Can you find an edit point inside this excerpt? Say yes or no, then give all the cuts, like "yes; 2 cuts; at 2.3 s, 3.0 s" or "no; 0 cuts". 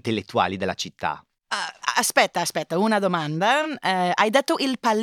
no; 0 cuts